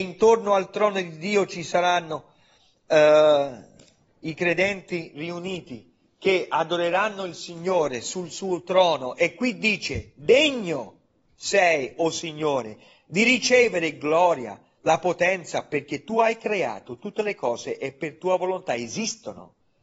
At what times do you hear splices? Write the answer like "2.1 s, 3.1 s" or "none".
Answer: 14.8 s